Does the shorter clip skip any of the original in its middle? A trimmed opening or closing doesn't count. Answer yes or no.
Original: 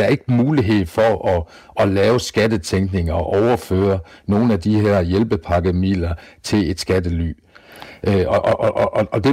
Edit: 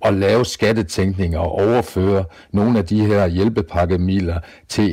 no